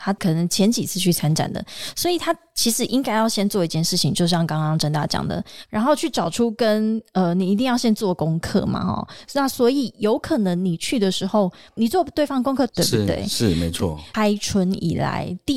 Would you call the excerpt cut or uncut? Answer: cut